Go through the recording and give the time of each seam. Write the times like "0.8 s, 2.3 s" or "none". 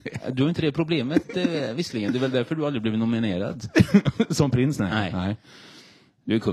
none

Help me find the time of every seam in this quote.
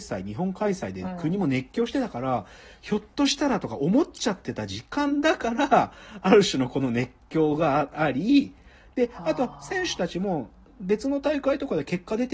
none

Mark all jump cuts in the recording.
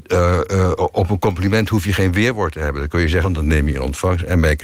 3.2 s

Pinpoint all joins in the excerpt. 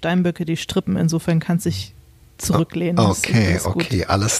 none

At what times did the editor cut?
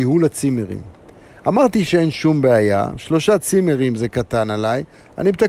none

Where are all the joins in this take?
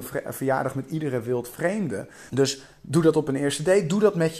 2.3 s

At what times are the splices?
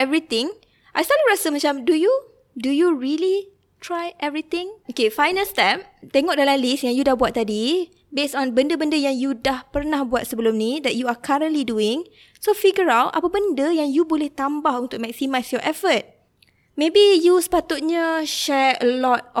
4.8 s

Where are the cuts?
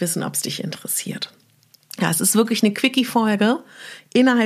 none

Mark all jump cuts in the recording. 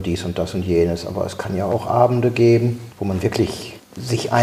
none

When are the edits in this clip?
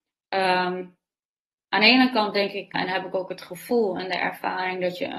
2.7 s

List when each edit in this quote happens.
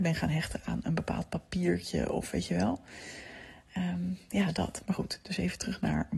none

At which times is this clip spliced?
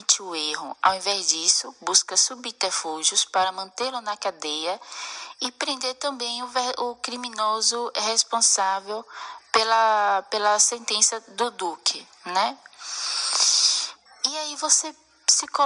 none

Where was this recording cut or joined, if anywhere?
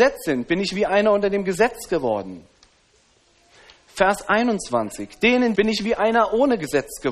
5.5 s

